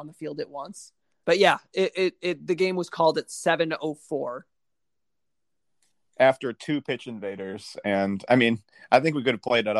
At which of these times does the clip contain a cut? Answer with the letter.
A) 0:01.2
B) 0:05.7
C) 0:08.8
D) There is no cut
A